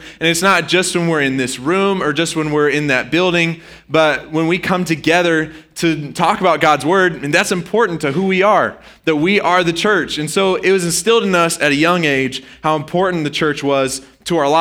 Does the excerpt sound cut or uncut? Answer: uncut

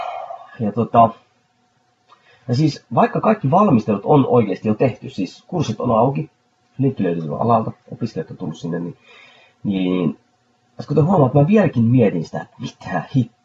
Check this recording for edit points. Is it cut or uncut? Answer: uncut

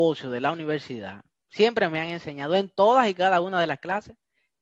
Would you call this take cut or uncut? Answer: uncut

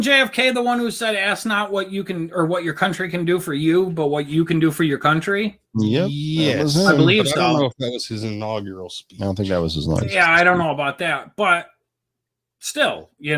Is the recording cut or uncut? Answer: cut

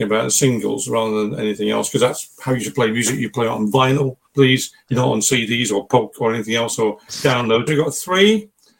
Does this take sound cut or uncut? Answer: cut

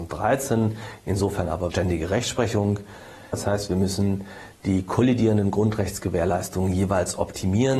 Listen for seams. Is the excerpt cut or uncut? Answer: cut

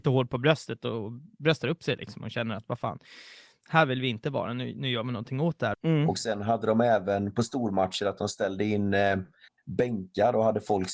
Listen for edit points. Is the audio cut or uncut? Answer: cut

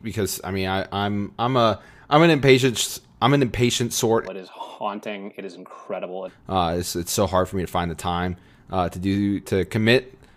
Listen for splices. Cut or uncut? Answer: cut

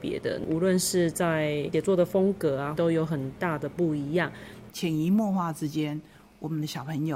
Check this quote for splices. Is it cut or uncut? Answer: cut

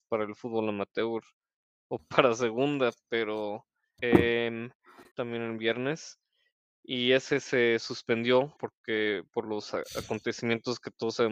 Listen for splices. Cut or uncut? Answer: cut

